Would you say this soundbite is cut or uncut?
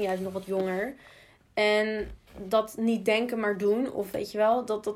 uncut